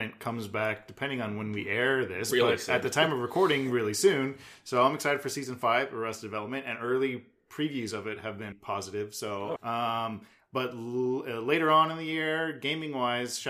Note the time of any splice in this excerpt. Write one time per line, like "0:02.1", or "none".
0:08.5
0:09.6